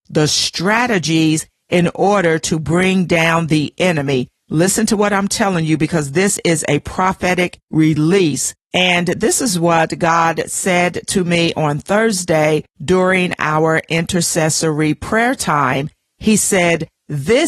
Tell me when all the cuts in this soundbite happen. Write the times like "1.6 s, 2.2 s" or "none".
none